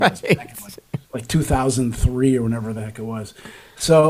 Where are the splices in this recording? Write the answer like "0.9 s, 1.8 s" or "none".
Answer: 1.0 s